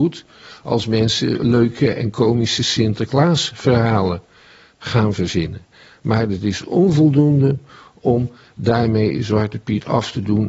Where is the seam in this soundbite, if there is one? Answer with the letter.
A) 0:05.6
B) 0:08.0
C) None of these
C